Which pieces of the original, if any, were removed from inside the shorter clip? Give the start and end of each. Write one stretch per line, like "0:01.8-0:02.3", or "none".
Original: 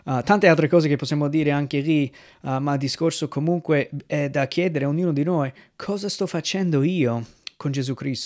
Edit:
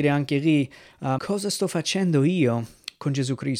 0:02.6-0:05.8